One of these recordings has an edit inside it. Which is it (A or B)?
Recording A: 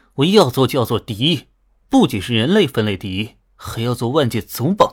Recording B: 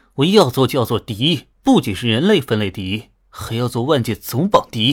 B